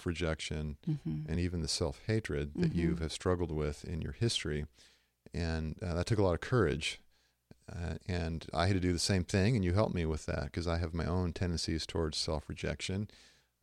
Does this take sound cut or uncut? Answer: uncut